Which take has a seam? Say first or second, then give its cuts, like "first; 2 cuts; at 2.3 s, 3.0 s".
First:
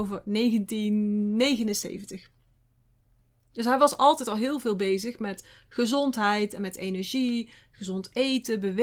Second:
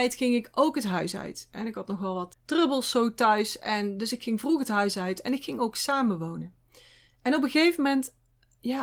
second; 1 cut; at 2.3 s